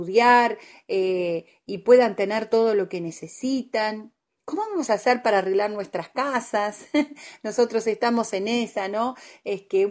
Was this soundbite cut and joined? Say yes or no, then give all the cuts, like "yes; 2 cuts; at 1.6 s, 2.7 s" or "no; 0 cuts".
no; 0 cuts